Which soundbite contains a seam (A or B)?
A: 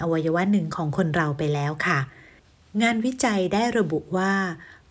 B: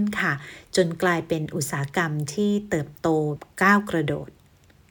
B